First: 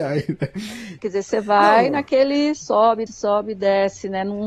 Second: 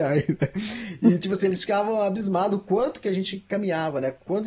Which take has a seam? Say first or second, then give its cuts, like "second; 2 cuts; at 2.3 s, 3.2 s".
first; 2 cuts; at 1.0 s, 3.1 s